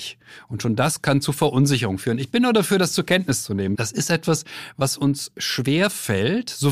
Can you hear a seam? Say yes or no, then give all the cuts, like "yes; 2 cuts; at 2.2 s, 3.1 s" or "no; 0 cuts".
yes; 1 cut; at 3.7 s